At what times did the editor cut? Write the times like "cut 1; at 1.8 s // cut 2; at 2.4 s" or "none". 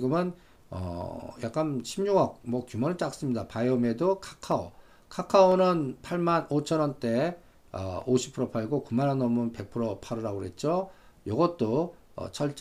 none